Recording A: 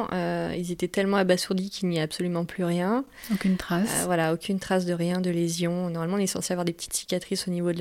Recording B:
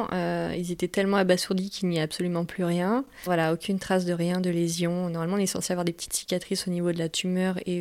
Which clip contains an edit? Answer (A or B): B